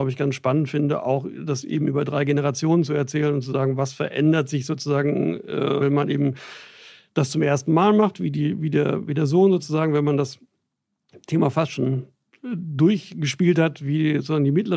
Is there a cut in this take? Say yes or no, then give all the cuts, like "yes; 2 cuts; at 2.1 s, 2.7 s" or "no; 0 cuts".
yes; 1 cut; at 5.8 s